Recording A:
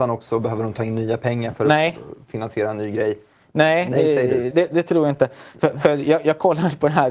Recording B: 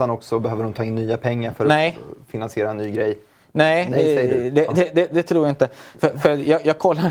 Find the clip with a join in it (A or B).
A